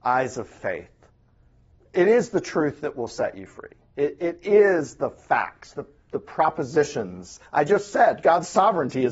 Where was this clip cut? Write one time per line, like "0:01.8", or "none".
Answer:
none